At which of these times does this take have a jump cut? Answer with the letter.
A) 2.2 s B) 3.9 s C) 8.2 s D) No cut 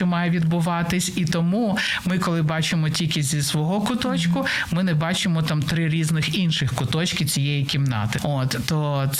C